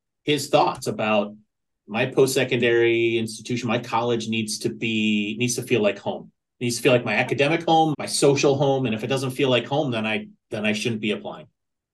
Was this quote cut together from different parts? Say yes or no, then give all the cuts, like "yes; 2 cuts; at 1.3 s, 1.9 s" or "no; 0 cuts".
yes; 1 cut; at 7.9 s